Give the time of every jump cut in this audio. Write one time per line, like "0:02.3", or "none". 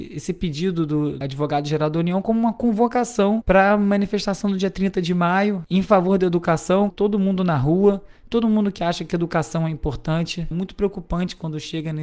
0:06.9
0:10.5